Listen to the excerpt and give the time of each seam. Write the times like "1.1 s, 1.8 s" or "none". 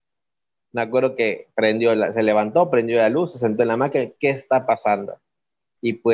none